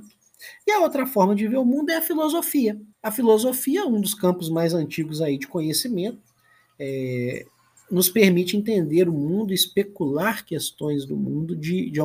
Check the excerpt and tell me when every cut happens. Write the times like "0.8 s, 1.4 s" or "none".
2.9 s